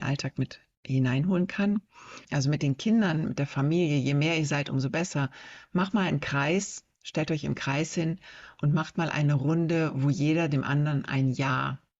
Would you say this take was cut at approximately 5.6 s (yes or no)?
no